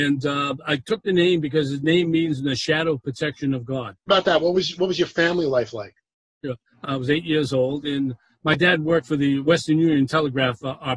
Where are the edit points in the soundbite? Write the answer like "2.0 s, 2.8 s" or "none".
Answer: 4.1 s, 6.8 s